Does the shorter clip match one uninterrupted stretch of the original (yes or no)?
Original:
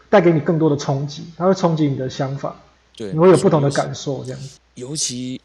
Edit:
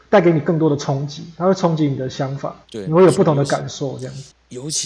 no